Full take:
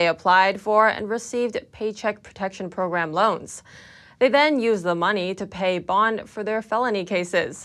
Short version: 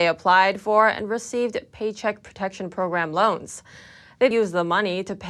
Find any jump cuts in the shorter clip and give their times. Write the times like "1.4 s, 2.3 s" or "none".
4.3 s